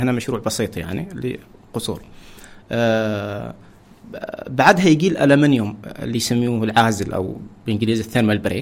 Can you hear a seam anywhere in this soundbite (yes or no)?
no